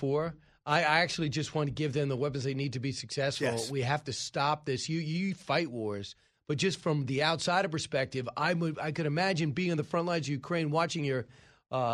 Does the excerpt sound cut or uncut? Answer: uncut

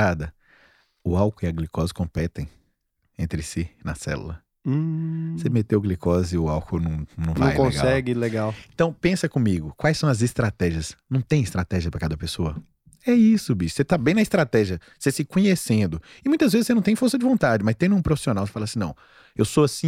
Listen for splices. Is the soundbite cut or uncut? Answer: uncut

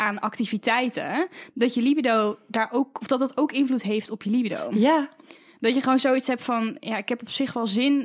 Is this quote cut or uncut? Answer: uncut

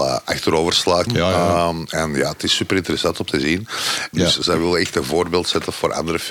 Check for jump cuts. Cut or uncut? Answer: cut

